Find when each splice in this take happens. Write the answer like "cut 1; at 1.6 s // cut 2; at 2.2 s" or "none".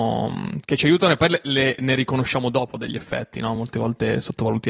none